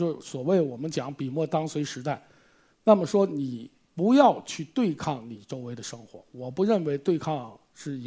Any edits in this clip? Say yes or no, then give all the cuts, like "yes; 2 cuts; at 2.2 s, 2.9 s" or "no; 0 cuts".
no; 0 cuts